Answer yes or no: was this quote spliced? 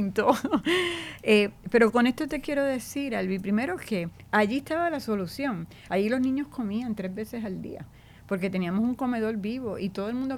no